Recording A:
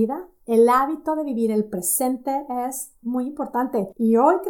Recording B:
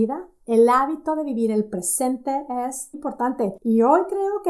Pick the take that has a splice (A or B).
B